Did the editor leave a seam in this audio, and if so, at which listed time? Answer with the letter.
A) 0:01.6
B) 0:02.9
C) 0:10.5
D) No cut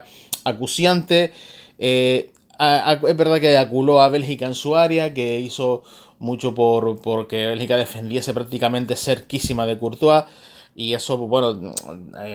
D